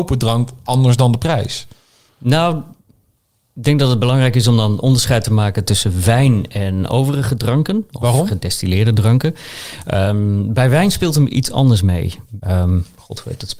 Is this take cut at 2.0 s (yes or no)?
no